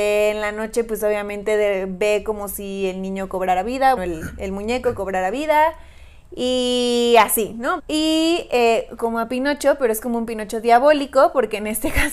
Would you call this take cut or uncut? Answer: cut